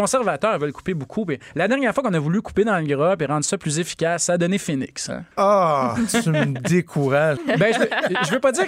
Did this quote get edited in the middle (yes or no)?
yes